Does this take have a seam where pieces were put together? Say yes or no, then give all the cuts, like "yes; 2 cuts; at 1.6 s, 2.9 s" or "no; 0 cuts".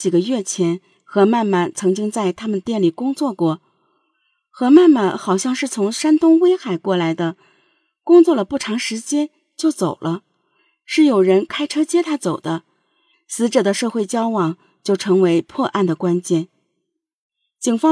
yes; 1 cut; at 13.1 s